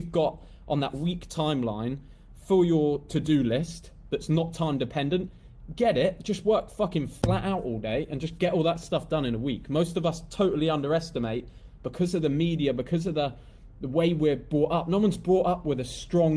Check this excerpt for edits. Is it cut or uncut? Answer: uncut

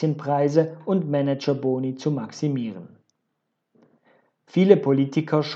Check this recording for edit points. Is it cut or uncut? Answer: uncut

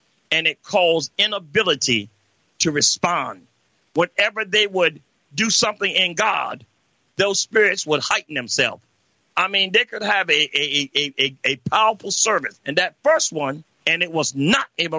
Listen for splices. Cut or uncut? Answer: cut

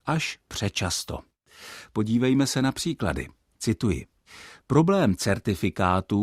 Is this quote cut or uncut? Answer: uncut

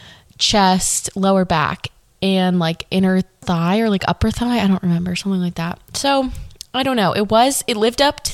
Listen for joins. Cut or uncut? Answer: uncut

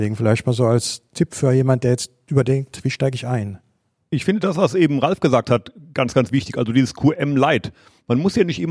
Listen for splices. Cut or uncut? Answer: uncut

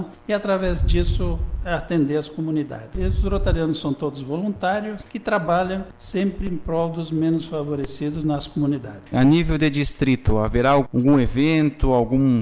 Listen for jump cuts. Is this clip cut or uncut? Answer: cut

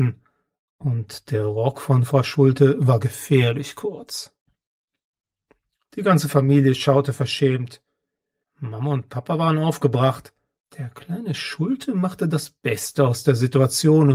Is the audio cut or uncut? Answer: cut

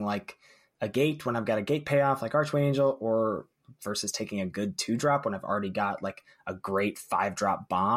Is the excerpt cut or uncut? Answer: uncut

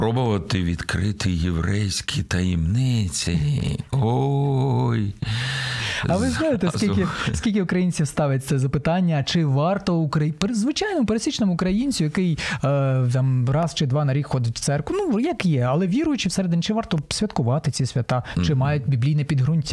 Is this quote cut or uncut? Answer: uncut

